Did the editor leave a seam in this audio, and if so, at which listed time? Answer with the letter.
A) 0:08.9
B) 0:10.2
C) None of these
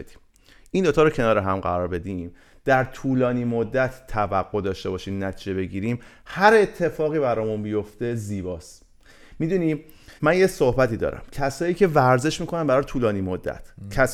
B